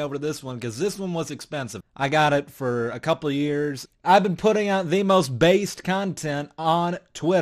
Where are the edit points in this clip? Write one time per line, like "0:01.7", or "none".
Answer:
0:01.8
0:03.9